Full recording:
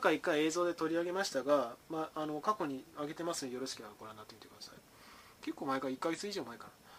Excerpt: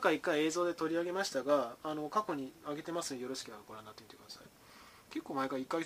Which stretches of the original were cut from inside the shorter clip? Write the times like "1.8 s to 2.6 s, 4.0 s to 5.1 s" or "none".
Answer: 1.8 s to 2.1 s